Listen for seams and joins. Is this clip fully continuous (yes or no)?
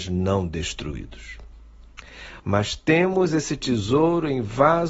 no